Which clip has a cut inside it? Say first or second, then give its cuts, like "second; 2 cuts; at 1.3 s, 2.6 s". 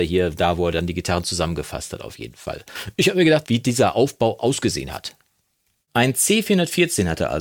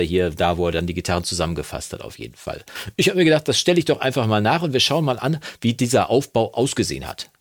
first; 1 cut; at 3.4 s